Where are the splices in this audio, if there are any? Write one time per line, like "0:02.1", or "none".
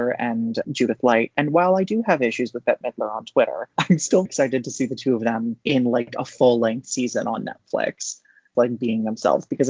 0:04.3
0:08.5